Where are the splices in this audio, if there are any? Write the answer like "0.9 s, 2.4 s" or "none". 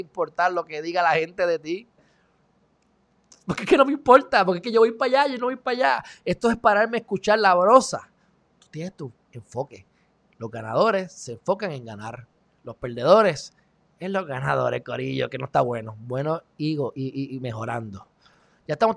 none

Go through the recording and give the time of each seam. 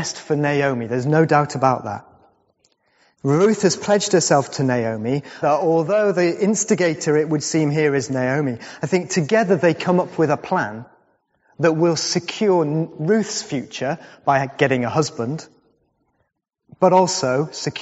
5.4 s

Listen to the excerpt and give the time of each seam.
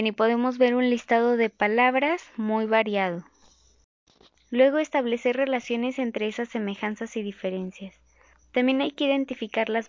4.3 s

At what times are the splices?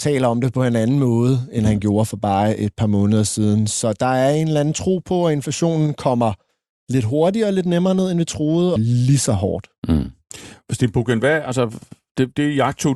8.8 s

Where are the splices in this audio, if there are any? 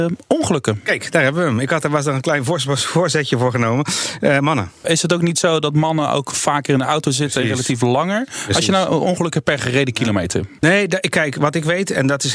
10.6 s

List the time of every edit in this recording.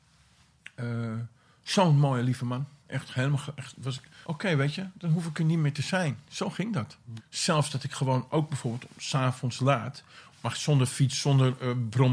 4.2 s, 7.2 s, 10.3 s

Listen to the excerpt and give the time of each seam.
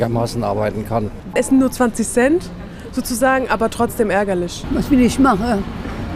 1.3 s

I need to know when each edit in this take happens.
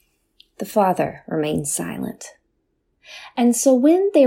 none

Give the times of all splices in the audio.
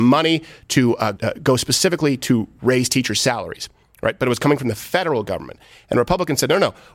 1.2 s

